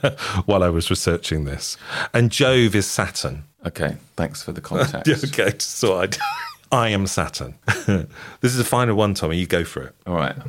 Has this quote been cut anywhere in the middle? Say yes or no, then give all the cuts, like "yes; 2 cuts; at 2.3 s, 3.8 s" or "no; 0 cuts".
no; 0 cuts